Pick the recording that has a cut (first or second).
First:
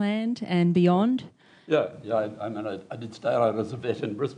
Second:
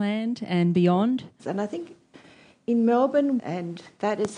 second